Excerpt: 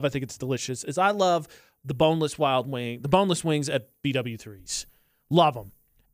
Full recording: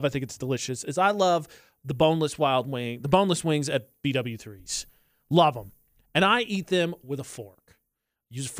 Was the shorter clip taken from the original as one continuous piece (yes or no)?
yes